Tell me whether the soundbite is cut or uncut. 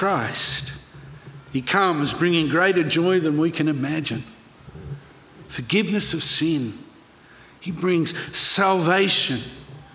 uncut